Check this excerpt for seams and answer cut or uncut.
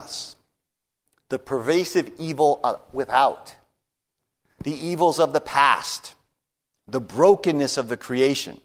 uncut